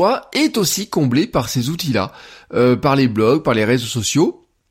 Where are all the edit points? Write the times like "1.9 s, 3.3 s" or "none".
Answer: none